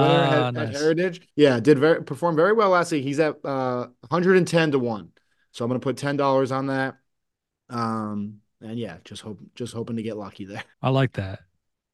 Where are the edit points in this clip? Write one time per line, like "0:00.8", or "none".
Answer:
0:01.3
0:10.7